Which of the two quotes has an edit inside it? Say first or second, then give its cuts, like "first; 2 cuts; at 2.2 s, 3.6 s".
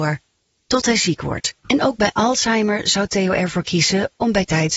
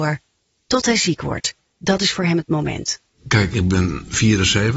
first; 1 cut; at 1.6 s